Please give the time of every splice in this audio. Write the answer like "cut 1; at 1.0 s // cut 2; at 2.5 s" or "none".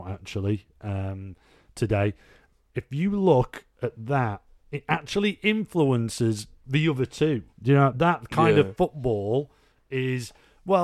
cut 1; at 7.9 s

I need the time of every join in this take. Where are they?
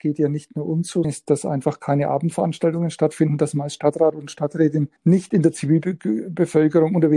cut 1; at 1.0 s // cut 2; at 5.0 s

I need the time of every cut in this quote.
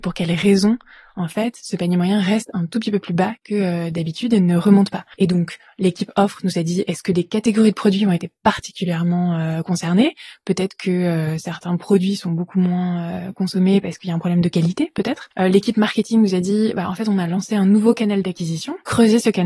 none

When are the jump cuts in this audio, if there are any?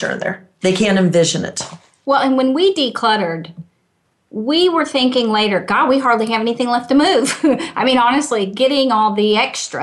none

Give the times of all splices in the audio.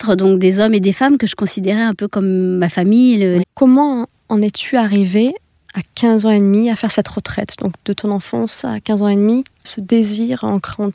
cut 1; at 3.4 s // cut 2; at 9.6 s

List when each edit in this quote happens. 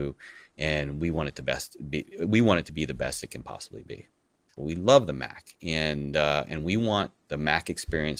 cut 1; at 4.6 s

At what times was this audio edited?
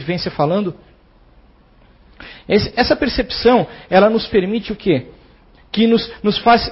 cut 1; at 2.7 s // cut 2; at 5.6 s

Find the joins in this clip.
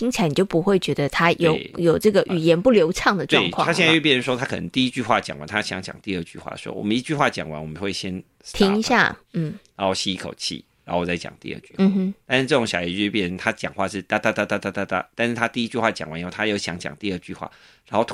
none

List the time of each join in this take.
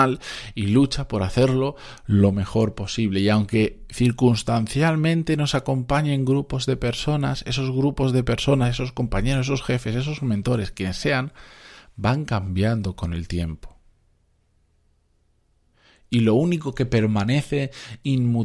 none

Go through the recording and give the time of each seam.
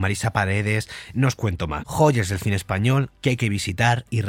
cut 1; at 1.8 s

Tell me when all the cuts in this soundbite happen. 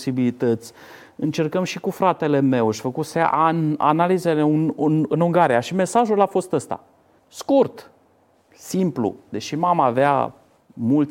cut 1; at 7.2 s

